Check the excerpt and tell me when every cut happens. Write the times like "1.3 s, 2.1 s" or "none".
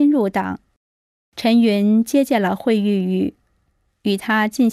1.2 s